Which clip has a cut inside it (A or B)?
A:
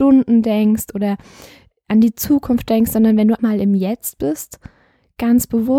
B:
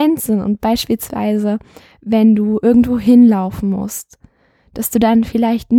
A